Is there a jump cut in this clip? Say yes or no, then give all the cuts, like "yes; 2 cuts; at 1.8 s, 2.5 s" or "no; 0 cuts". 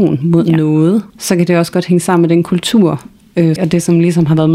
yes; 2 cuts; at 1.1 s, 3.6 s